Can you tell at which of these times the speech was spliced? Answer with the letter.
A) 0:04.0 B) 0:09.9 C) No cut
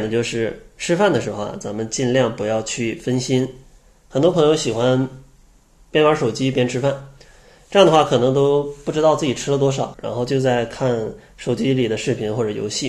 B